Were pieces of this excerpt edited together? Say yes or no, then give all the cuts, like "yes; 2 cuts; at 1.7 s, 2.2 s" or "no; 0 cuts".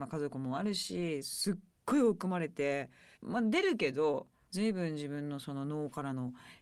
yes; 2 cuts; at 3.1 s, 4.5 s